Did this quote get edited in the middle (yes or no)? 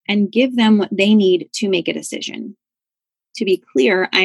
no